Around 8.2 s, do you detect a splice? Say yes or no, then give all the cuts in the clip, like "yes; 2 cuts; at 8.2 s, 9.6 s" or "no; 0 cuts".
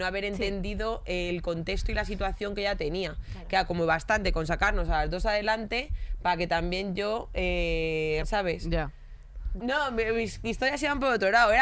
yes; 2 cuts; at 8.2 s, 9.6 s